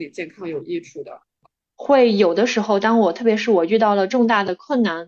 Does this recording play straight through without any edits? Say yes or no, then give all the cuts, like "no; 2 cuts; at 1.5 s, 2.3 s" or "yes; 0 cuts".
no; 1 cut; at 1.8 s